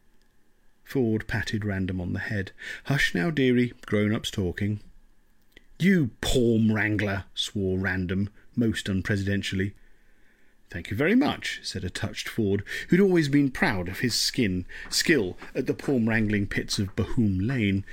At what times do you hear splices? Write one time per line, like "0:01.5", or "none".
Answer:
none